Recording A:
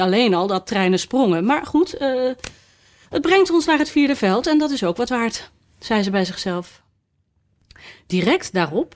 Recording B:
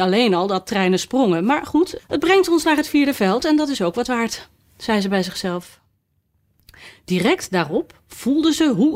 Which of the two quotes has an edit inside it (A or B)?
B